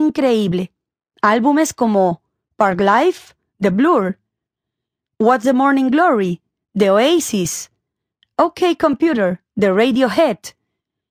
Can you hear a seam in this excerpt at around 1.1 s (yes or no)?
yes